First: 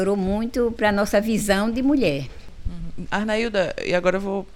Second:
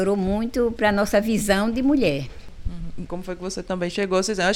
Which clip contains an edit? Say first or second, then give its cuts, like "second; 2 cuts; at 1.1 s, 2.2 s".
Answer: second; 1 cut; at 3.1 s